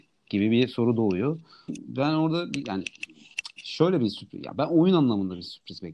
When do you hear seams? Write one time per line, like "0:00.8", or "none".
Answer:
0:01.7

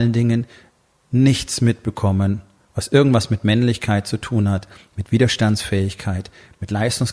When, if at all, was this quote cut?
none

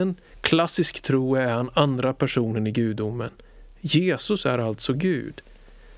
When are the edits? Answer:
none

